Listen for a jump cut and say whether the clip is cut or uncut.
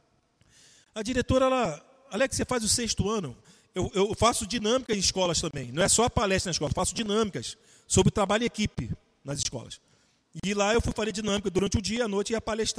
uncut